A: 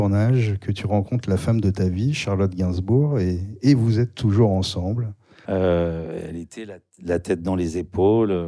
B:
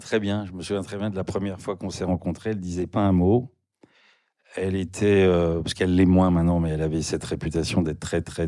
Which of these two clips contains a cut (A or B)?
A